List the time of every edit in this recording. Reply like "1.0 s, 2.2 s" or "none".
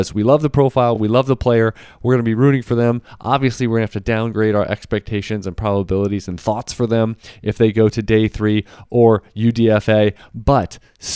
none